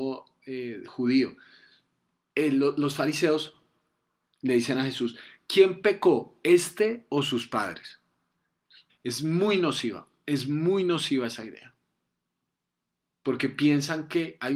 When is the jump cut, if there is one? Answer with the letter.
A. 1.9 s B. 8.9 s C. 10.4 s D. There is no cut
B